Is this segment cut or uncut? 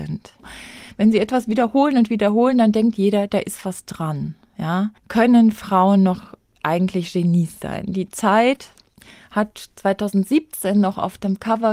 cut